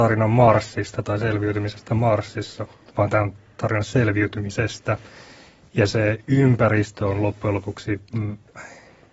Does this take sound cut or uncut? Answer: uncut